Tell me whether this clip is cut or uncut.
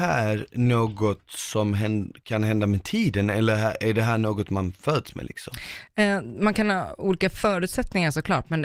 uncut